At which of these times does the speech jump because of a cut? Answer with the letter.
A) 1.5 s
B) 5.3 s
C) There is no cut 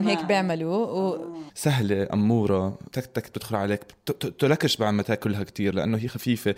A